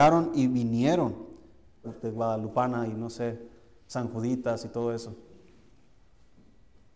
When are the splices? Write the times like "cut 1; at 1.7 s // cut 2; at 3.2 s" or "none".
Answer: cut 1; at 1.8 s